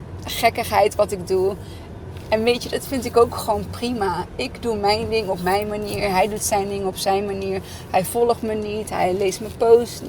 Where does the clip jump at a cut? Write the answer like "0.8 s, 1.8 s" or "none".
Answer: none